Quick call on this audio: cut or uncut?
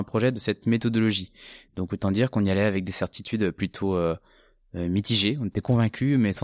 uncut